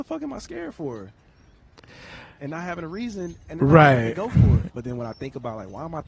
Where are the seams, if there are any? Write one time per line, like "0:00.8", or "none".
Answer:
0:04.7